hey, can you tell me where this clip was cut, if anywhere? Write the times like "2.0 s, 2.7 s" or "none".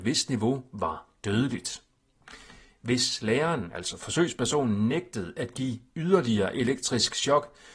none